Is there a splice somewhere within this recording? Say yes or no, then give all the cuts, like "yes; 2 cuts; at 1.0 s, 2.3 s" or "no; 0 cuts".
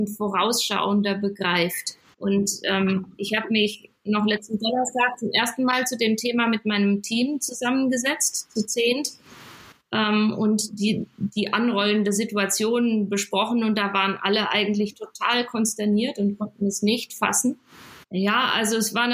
yes; 2 cuts; at 2.1 s, 18.0 s